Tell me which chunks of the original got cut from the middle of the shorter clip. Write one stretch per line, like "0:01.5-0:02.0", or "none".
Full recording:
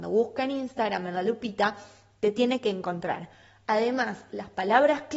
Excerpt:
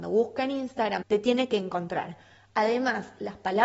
0:01.0-0:02.1